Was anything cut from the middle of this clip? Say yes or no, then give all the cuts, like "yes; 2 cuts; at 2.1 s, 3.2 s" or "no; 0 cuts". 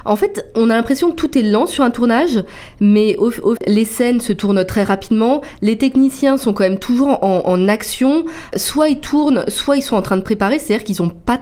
yes; 1 cut; at 3.6 s